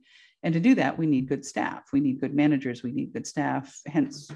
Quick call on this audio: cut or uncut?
uncut